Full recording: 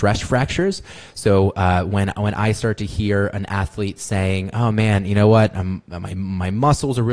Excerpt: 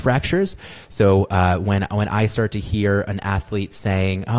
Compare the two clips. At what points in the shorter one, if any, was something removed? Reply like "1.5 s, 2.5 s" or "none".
none